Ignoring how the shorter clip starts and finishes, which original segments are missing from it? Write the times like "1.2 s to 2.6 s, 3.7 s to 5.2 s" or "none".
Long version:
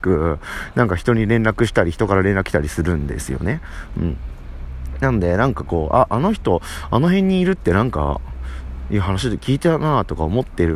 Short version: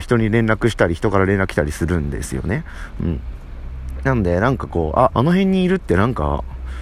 6.1 s to 6.9 s